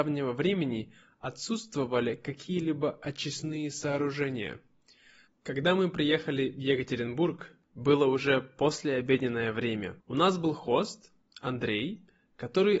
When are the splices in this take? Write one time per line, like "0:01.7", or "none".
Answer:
0:05.3
0:10.0